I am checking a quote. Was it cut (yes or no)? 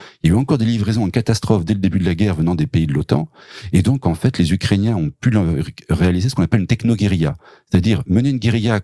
no